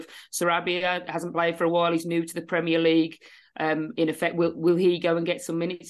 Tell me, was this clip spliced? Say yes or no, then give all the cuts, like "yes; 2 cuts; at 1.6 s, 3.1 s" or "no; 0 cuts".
no; 0 cuts